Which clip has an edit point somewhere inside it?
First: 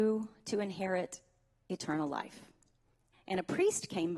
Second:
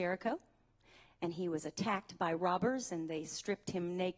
first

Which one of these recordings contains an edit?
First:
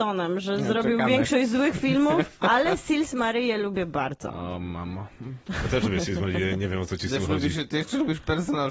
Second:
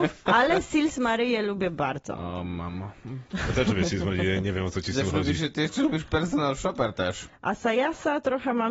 second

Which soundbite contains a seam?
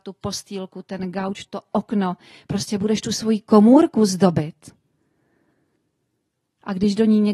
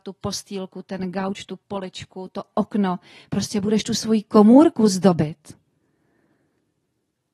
first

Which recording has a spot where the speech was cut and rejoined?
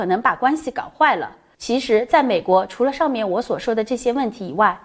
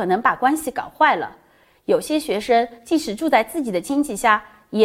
first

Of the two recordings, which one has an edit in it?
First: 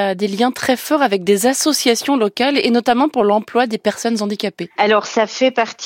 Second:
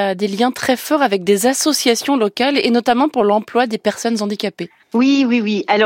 first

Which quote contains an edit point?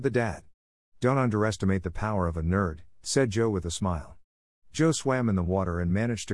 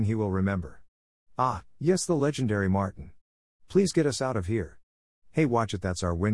second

